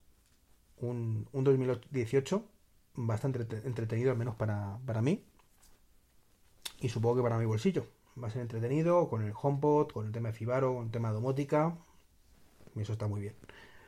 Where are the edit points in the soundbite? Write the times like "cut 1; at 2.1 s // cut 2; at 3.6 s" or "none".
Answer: cut 1; at 8.1 s // cut 2; at 9.9 s // cut 3; at 12.7 s